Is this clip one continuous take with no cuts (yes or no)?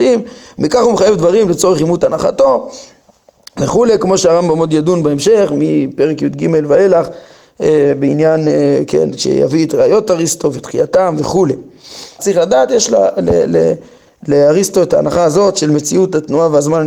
no